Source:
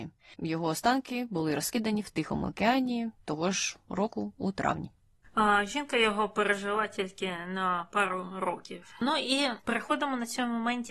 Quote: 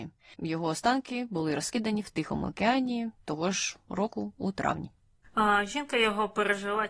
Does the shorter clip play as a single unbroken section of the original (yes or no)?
yes